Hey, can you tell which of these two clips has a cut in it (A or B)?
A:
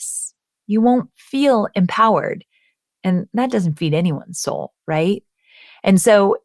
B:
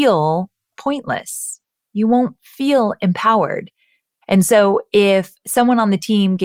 B